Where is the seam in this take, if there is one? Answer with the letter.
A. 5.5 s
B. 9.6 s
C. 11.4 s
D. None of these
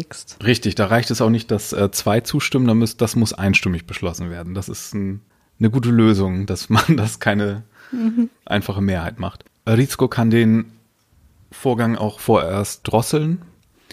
D